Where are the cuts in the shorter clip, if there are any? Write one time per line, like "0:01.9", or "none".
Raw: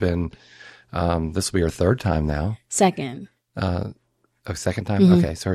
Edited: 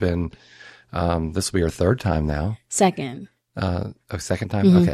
0:04.0